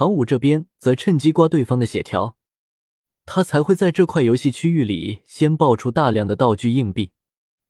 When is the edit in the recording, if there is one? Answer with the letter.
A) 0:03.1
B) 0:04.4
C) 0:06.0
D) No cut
A